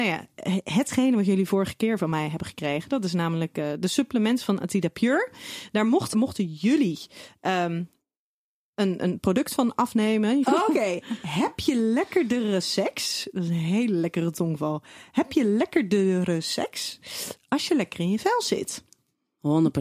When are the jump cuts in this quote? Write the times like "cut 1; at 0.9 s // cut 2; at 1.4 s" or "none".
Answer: cut 1; at 6.1 s // cut 2; at 10.4 s